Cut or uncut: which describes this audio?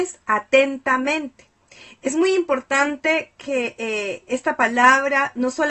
uncut